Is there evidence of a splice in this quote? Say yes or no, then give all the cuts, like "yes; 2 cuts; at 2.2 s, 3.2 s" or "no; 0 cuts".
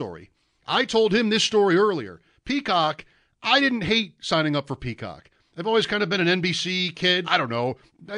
yes; 1 cut; at 7.2 s